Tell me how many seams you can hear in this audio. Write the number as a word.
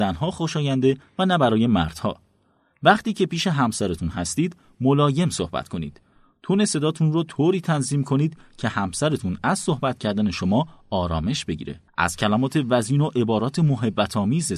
one